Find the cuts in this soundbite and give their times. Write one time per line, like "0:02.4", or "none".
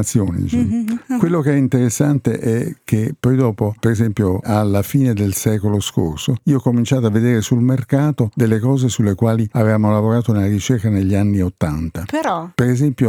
none

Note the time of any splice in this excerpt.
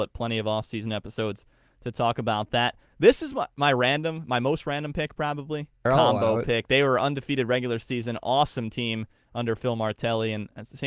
0:05.9

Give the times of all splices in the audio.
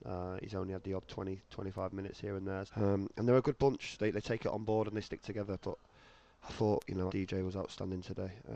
0:02.7
0:07.1

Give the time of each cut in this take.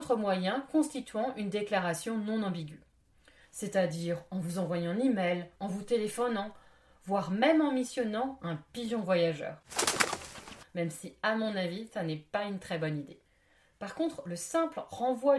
0:05.6

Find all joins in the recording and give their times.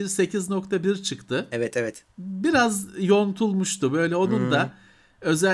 0:02.1

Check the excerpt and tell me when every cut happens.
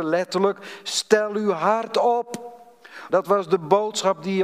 0:03.1

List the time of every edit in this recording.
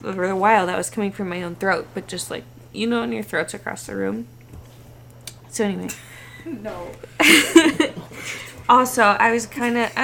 none

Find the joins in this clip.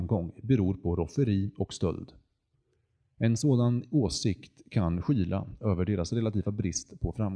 none

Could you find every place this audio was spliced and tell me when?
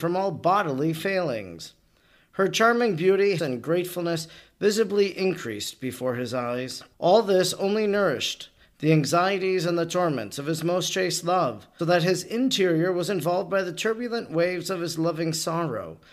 0:03.4
0:06.9
0:11.8

